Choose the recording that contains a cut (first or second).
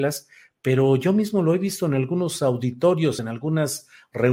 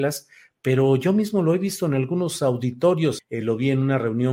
second